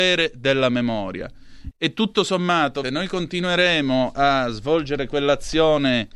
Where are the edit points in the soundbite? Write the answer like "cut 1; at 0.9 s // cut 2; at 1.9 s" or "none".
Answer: cut 1; at 1.7 s // cut 2; at 2.8 s